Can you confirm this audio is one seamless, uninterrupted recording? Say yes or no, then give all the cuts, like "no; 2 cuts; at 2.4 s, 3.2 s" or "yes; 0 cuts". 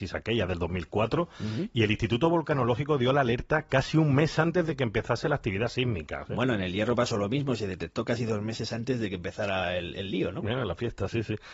yes; 0 cuts